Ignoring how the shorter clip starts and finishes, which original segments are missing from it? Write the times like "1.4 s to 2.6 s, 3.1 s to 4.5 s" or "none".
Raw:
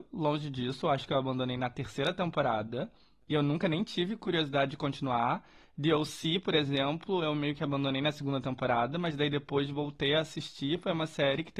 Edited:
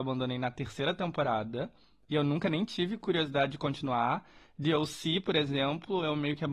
none

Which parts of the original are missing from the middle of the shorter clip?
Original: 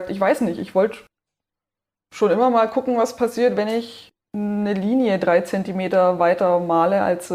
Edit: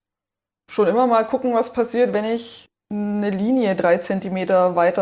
none

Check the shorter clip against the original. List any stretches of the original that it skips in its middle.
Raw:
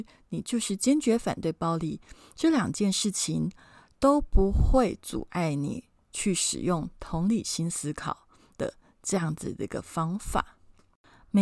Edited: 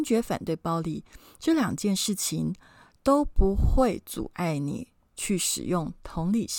none

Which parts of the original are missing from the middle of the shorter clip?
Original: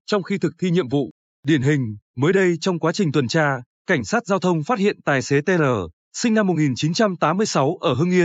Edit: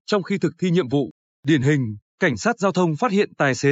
2.1 s to 3.7 s

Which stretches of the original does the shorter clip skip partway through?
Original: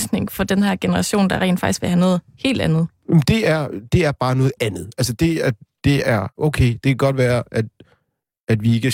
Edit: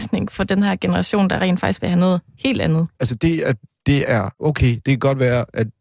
2.9 s to 4.9 s

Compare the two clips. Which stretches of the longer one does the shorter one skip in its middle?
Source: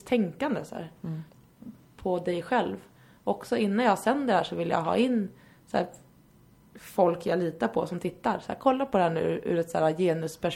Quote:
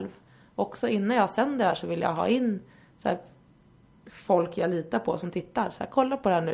none

